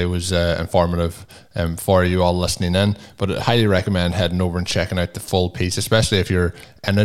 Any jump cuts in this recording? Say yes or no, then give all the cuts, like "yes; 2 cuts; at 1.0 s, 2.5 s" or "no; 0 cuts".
no; 0 cuts